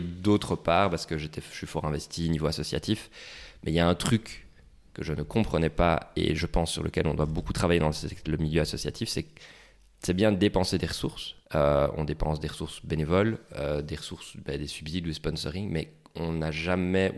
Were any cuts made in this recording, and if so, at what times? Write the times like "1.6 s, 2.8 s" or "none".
11.4 s